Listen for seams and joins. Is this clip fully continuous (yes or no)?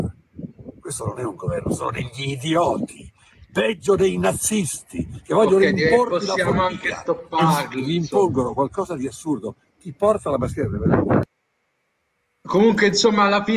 yes